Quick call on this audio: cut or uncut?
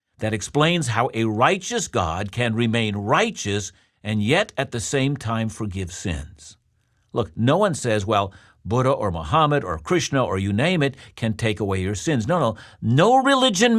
uncut